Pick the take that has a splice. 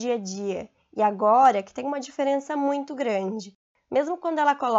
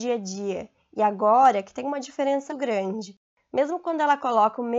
second; 1 cut; at 2.5 s

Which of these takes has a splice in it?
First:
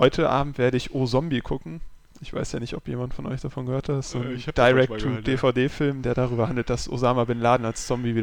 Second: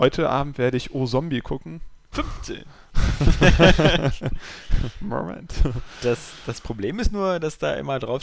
second; 1 cut; at 2.1 s

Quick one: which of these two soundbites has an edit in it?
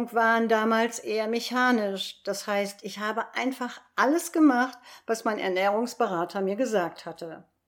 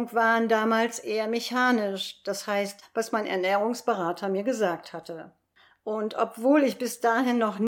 second; 1 cut; at 2.8 s

